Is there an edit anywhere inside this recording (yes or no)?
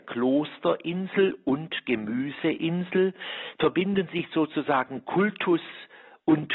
no